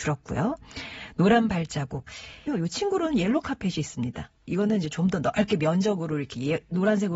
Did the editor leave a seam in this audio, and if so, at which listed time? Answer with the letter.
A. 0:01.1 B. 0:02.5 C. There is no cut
B